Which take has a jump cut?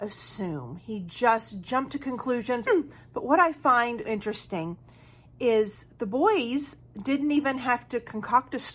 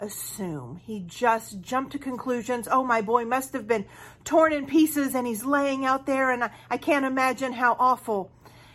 first; 2 cuts; at 2.7 s, 4.0 s

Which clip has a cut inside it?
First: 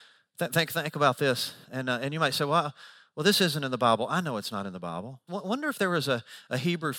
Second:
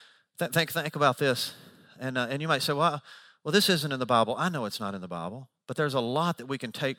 first; 2 cuts; at 1.6 s, 5.3 s

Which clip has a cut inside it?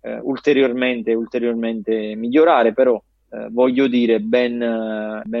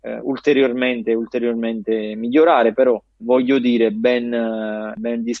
second; 1 cut; at 3.2 s

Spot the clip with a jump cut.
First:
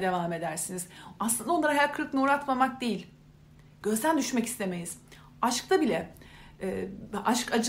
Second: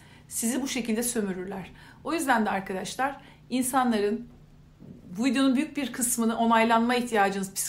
first; 1 cut; at 1.2 s

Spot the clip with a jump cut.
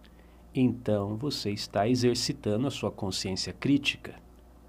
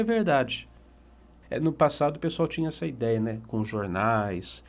second; 1 cut; at 1.4 s

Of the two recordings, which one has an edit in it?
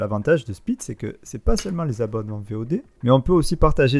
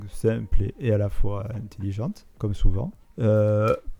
first; 1 cut; at 3.0 s

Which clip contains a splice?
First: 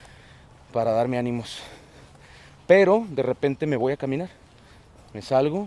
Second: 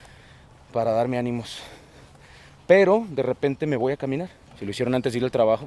second; 1 cut; at 4.5 s

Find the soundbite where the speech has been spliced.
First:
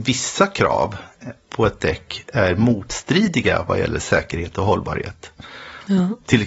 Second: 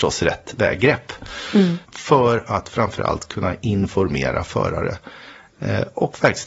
second; 1 cut; at 1.8 s

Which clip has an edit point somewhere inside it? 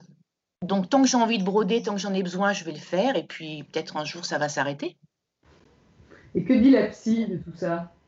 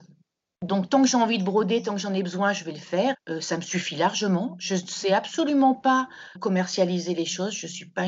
second; 2 cuts; at 3.1 s, 6.4 s

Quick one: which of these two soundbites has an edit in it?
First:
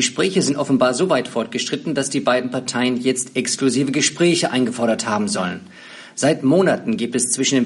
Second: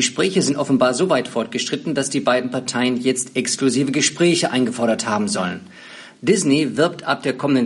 second; 1 cut; at 6.1 s

